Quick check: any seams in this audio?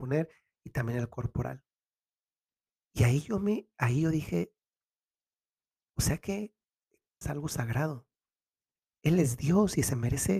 yes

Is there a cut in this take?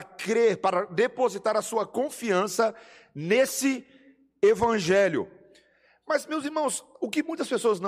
no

